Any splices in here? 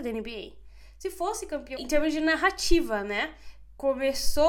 yes; 1 cut; at 1.8 s

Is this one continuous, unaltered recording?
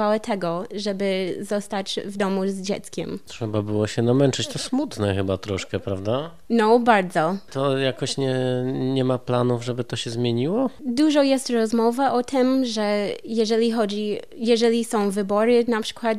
yes; 0 cuts

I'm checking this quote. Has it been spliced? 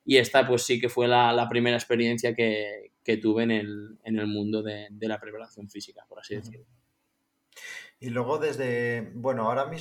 no; 0 cuts

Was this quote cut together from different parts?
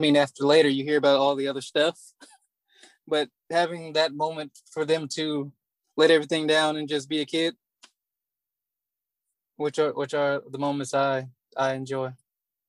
no; 0 cuts

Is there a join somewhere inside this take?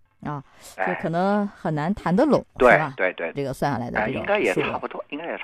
yes; 1 cut; at 3.3 s

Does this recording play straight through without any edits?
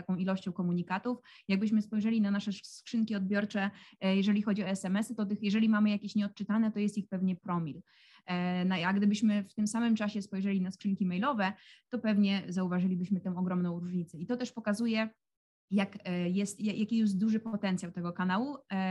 yes; 0 cuts

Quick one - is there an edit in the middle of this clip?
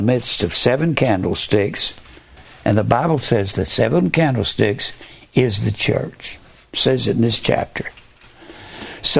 no; 0 cuts

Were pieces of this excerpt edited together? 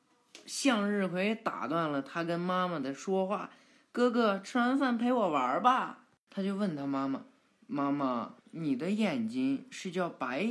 yes; 2 cuts; at 6.3 s, 8.4 s

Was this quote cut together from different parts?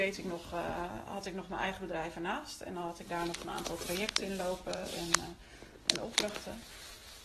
no; 0 cuts

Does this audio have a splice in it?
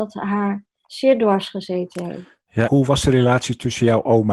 yes; 1 cut; at 2.6 s

